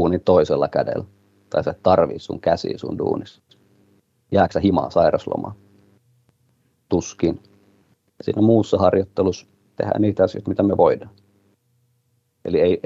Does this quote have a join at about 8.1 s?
yes; 1 cut; at 8.1 s

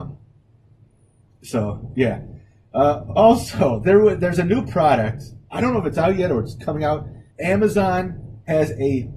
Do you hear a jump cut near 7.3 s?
yes; 1 cut; at 7.3 s

